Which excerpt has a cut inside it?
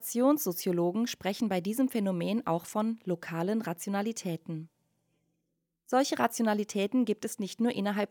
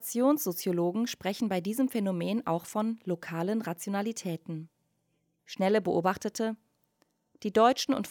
second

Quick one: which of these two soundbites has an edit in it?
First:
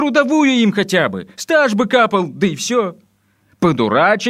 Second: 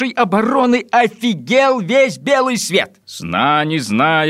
second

